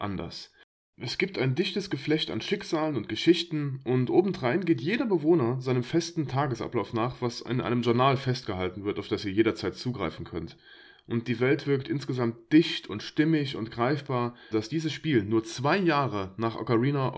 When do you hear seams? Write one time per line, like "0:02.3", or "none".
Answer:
0:14.5

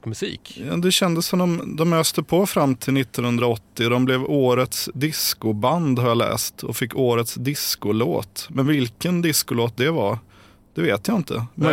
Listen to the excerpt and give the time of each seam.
none

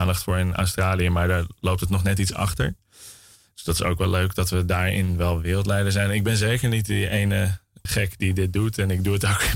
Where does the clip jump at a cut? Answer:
0:07.9

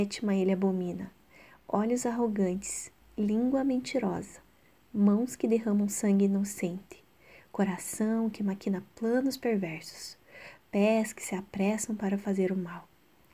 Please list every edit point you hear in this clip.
none

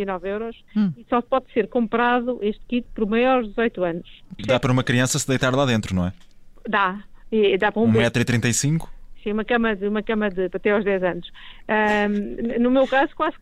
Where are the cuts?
0:04.4

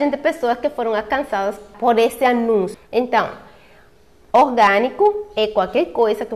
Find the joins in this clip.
none

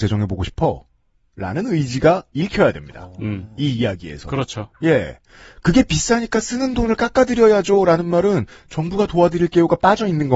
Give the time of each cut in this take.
none

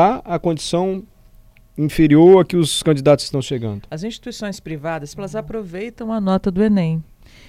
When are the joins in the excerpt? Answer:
0:03.9
0:05.1

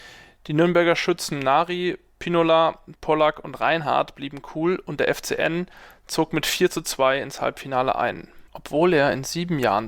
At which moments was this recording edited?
0:08.5

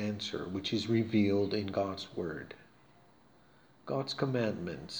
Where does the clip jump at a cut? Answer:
none

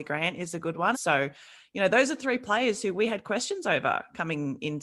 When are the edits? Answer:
0:00.9

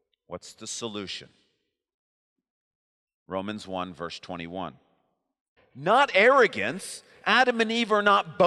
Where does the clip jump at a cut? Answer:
0:05.6

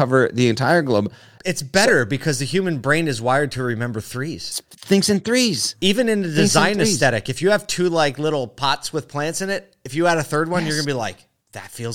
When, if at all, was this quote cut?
0:01.4

